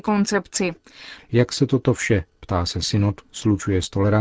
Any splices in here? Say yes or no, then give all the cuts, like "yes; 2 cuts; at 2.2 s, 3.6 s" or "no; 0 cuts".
yes; 1 cut; at 1.2 s